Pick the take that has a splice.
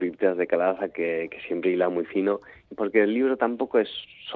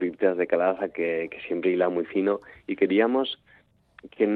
first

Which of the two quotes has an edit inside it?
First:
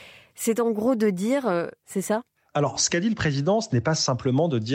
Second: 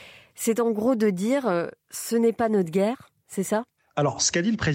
first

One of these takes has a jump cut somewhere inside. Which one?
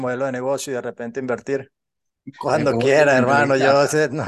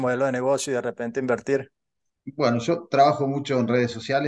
first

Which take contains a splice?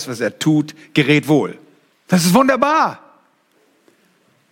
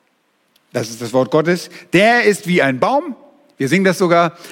first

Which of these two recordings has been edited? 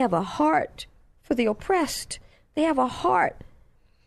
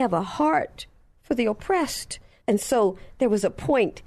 second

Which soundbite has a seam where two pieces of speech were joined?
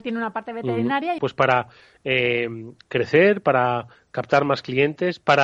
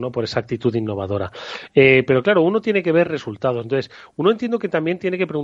first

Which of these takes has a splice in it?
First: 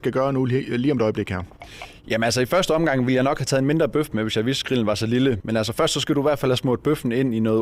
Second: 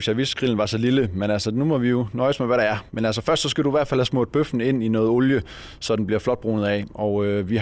first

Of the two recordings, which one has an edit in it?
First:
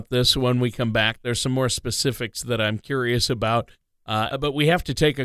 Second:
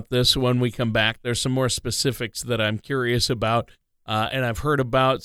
first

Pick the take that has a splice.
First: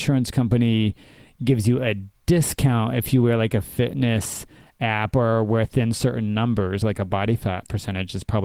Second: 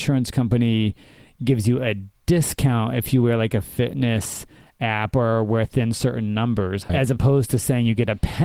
second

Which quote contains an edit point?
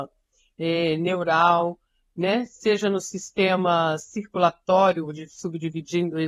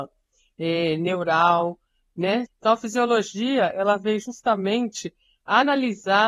second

